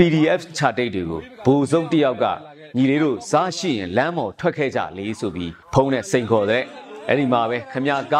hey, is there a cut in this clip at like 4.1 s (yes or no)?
no